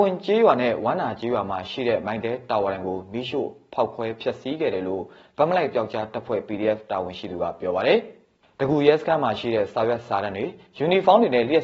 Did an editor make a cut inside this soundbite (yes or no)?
no